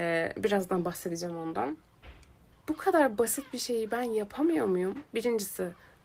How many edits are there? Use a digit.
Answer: 1